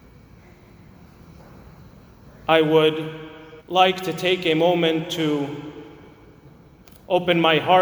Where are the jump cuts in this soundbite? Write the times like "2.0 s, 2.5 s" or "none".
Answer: 3.6 s